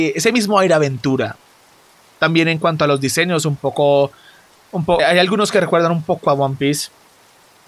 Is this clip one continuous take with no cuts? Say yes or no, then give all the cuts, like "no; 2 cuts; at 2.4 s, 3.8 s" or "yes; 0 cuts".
no; 1 cut; at 5.0 s